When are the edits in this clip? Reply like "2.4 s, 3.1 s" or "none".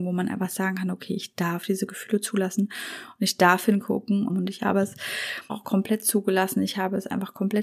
4.3 s, 5.5 s

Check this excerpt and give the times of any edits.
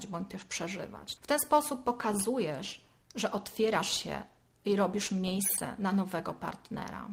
1.2 s

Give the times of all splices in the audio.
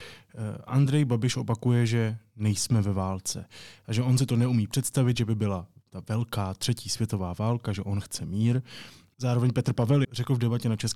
10.0 s

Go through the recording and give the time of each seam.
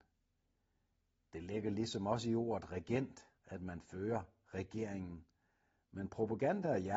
3.4 s

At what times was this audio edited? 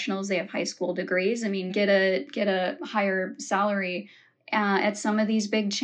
1.7 s, 4.4 s

